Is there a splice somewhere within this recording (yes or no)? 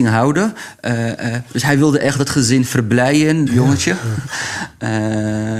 yes